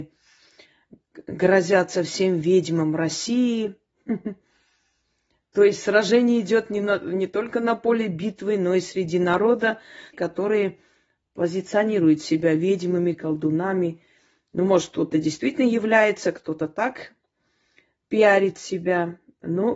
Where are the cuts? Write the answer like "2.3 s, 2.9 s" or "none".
10.1 s